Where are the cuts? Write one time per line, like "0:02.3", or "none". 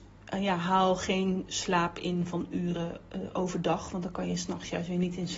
none